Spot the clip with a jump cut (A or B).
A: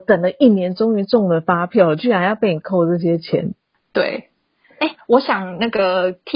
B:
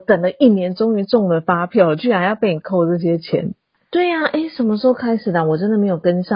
B